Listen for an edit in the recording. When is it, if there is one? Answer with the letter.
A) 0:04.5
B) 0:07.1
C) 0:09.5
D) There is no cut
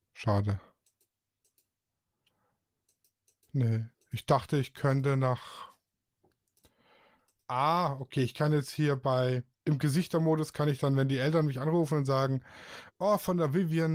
C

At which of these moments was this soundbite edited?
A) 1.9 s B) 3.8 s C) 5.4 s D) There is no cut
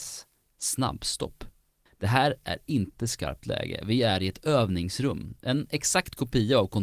A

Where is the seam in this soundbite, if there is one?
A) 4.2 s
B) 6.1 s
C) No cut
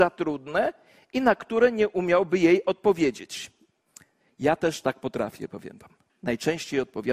B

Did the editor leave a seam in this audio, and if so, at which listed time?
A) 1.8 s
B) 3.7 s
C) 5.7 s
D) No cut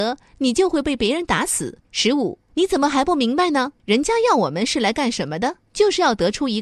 A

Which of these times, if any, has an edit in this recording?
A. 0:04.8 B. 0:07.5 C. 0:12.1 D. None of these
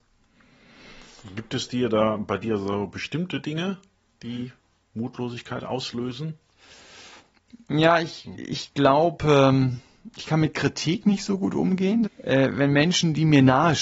C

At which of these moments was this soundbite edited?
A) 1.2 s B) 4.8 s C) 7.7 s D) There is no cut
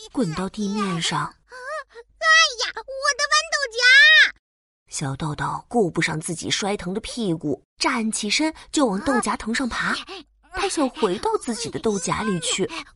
C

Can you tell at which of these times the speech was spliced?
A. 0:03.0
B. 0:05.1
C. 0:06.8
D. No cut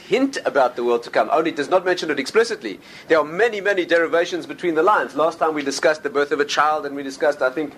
D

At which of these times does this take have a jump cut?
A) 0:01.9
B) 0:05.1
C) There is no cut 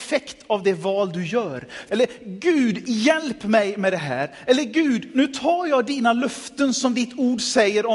A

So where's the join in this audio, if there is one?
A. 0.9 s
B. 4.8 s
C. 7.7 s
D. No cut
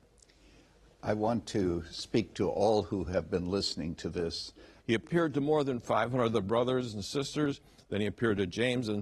B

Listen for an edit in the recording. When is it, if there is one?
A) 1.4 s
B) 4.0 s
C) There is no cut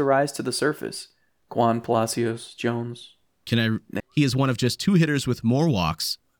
B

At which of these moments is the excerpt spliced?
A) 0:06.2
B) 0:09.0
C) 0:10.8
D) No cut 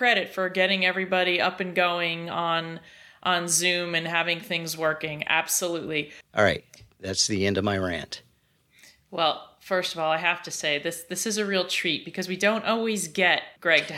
A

